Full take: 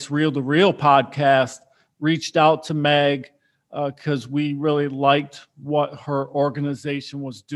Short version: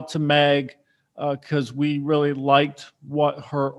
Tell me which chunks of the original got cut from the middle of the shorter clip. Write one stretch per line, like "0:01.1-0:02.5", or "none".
none